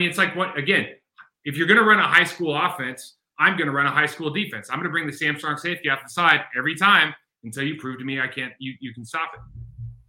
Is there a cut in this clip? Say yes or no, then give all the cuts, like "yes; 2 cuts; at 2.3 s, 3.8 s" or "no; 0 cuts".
no; 0 cuts